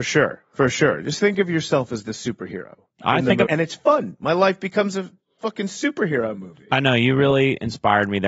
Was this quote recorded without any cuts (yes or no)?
no